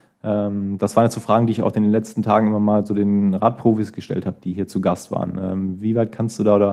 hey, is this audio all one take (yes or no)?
yes